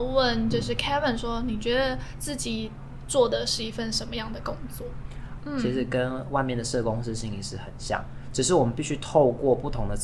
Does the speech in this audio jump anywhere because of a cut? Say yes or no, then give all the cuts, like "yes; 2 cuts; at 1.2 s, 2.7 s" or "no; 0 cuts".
yes; 1 cut; at 5.4 s